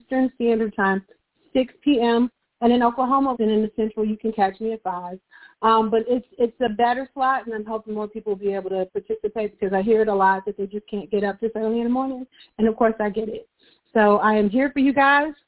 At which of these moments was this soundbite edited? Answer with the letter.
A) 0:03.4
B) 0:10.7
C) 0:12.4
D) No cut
A